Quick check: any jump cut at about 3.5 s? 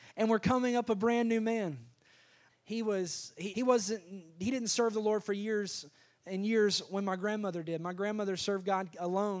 yes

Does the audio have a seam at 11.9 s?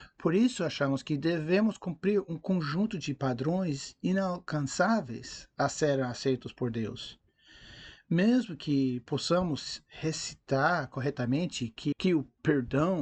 yes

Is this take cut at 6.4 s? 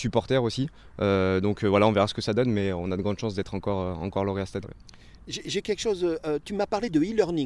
no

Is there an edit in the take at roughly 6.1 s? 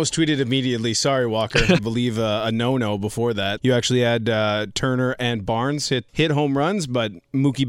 yes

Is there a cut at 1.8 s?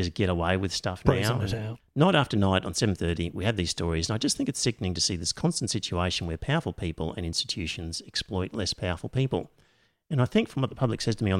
yes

